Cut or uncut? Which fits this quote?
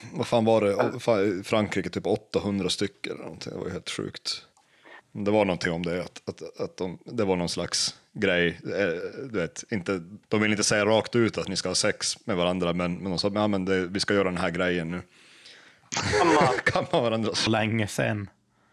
cut